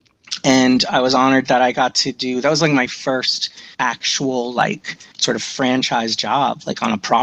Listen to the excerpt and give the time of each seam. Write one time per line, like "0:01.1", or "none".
0:03.7
0:05.1